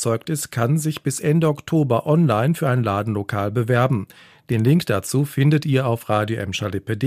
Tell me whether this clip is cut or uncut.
uncut